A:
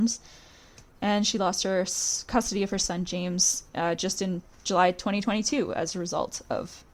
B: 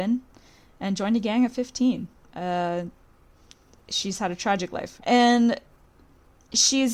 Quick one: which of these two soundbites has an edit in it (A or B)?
B